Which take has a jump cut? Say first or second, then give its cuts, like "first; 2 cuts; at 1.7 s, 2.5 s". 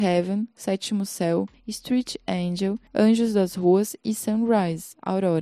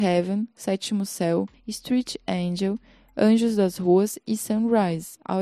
first; 1 cut; at 2.9 s